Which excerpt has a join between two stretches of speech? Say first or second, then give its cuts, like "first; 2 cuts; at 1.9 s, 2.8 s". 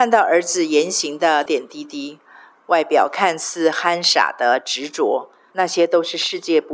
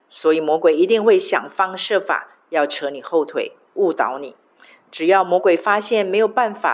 first; 2 cuts; at 1.5 s, 5.5 s